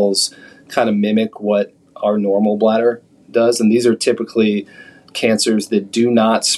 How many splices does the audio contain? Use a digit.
0